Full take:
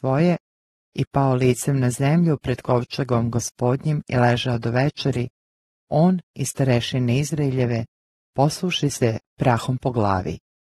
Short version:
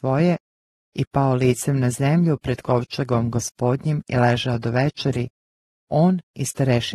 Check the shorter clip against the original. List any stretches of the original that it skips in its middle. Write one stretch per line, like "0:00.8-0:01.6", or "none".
none